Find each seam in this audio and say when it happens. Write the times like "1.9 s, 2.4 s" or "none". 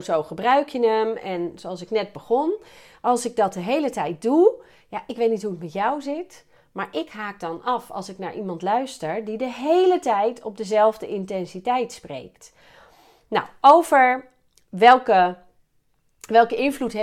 none